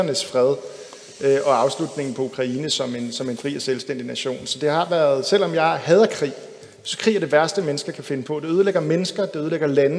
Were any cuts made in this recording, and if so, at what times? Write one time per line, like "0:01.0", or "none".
none